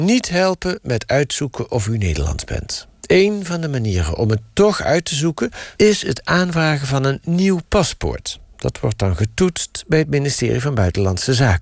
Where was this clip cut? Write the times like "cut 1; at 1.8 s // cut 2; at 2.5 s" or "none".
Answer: cut 1; at 3.0 s // cut 2; at 5.8 s